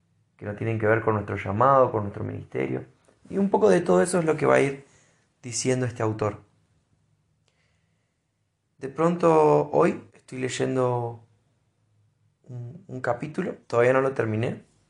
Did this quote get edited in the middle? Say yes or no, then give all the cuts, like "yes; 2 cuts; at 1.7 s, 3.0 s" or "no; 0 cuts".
yes; 2 cuts; at 10.1 s, 13.6 s